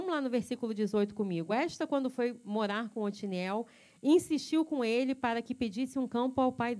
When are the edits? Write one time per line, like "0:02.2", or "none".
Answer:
none